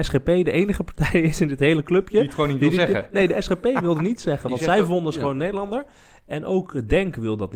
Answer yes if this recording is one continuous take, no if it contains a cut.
yes